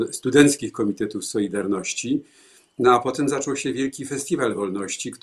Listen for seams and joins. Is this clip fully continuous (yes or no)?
yes